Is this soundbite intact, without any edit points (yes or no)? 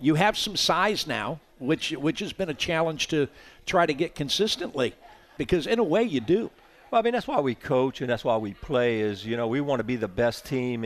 no